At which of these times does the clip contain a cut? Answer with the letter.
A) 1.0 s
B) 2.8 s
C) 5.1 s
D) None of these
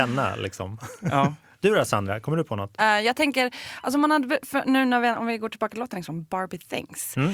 B